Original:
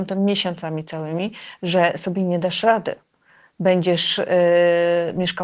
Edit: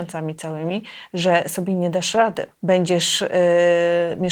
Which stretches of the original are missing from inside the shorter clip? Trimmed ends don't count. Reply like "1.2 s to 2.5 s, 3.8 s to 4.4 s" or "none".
3.0 s to 3.5 s